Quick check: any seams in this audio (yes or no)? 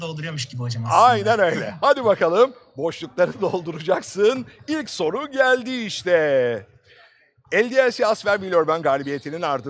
no